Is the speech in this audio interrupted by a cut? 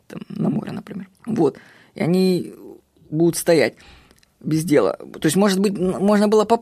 yes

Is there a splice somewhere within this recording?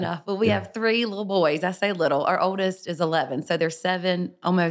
no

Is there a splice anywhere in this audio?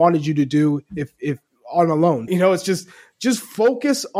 yes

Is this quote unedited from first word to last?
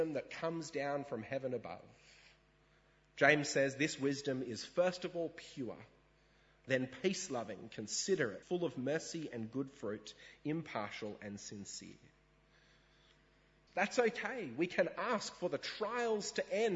no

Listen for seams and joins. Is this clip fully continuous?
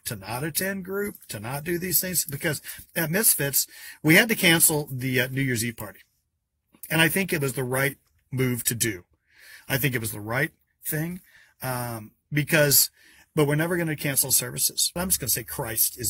no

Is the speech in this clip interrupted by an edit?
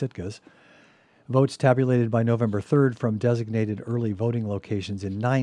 no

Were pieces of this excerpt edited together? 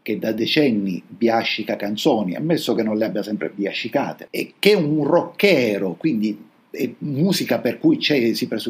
yes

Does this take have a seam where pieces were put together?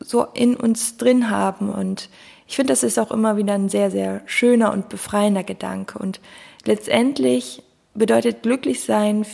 yes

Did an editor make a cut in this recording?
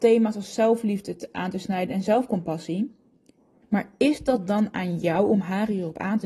yes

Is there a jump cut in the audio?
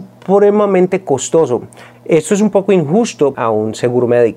yes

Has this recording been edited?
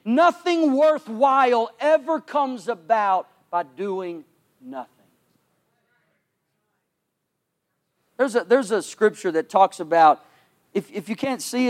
no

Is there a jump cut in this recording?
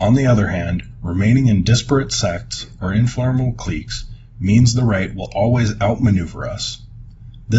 no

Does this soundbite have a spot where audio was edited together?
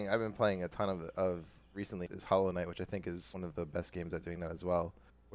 no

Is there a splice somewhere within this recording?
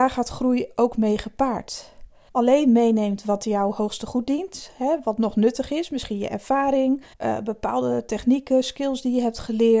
yes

